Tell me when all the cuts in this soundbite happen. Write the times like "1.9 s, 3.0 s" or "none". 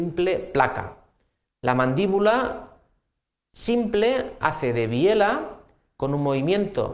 1.5 s